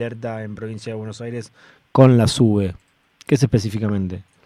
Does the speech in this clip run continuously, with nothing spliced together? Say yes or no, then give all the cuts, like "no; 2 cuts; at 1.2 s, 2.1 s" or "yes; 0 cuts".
yes; 0 cuts